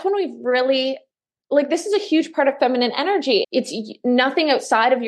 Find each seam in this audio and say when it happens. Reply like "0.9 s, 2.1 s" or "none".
3.4 s